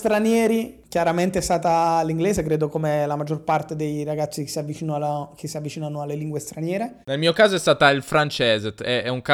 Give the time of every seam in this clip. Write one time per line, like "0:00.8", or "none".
0:07.0